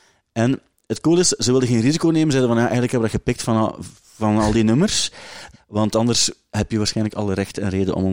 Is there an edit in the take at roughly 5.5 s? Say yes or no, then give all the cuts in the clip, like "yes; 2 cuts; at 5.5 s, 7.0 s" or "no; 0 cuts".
yes; 1 cut; at 5.5 s